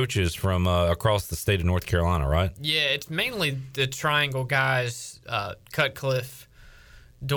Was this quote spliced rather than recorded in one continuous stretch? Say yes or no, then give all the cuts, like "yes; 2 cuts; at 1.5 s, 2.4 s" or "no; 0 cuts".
no; 0 cuts